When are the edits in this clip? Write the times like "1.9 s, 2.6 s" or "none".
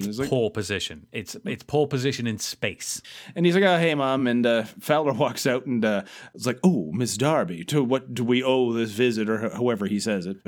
none